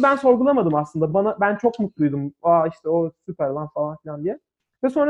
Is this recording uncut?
yes; 0 cuts

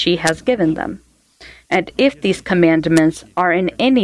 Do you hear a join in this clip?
yes; 1 cut; at 1.7 s

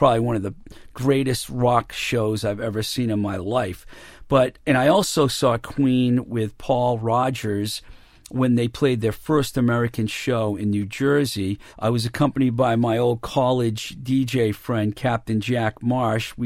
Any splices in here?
yes; 1 cut; at 11.7 s

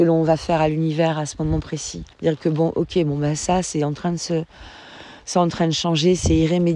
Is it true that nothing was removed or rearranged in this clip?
no; 1 cut; at 2.1 s

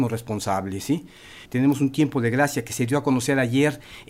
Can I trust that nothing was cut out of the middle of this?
no; 1 cut; at 1.5 s

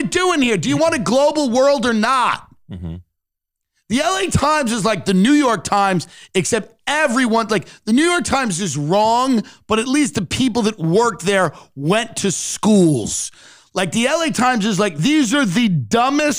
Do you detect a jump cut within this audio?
no; 0 cuts

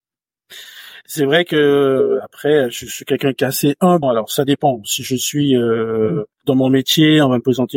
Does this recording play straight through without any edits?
no; 2 cuts; at 4.0 s, 6.3 s

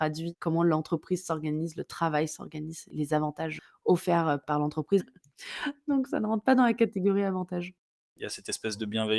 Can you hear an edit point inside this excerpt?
yes; 2 cuts; at 5.0 s, 8.2 s

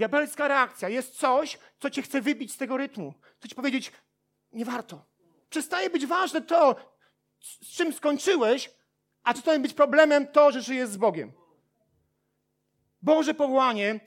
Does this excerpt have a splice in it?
yes; 1 cut; at 5.4 s

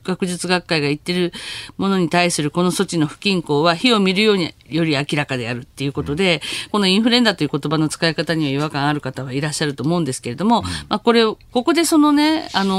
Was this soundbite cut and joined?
yes; 2 cuts; at 6.7 s, 11.5 s

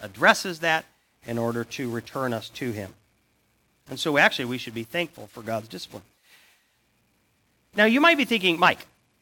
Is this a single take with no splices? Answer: yes; 0 cuts

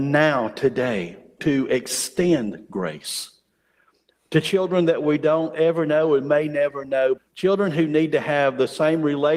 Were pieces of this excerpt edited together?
yes; 2 cuts; at 1.4 s, 7.2 s

